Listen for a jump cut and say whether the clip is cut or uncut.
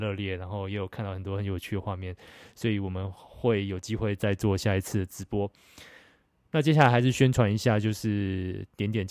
uncut